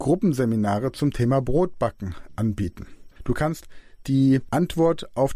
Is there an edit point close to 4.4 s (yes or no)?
no